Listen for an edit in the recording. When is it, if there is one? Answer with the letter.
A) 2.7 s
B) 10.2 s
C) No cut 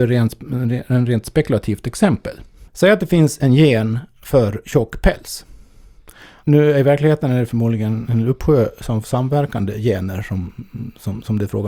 A